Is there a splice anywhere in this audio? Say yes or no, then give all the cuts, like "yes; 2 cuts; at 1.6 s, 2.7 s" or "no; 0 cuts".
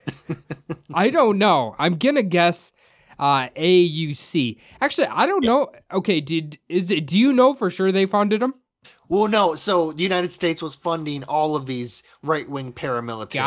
no; 0 cuts